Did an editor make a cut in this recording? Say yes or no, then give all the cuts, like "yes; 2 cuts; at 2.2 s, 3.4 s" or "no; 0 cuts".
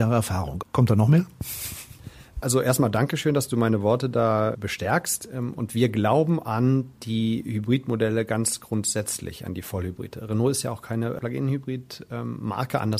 yes; 1 cut; at 2.4 s